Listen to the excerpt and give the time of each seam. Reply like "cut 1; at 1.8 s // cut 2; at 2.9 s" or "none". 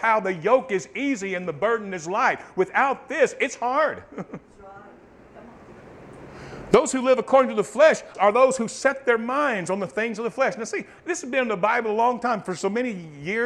cut 1; at 8.1 s